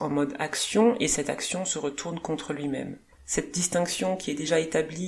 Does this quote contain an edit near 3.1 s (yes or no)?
yes